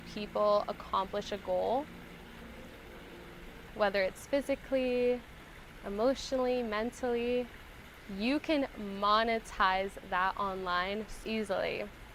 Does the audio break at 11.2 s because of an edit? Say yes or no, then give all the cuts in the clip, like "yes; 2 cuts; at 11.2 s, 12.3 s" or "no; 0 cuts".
yes; 2 cuts; at 3.7 s, 11.2 s